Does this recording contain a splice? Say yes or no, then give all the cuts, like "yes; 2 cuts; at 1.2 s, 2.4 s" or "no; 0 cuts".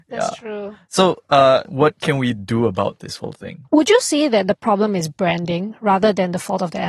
yes; 2 cuts; at 1.6 s, 3.6 s